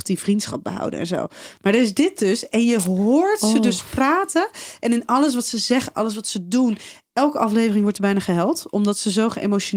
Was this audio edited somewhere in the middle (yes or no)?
no